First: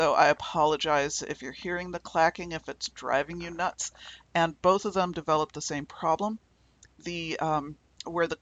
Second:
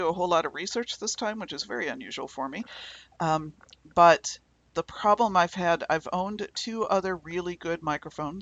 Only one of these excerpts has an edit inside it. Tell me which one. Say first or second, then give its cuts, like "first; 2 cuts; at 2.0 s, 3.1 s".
first; 1 cut; at 4.2 s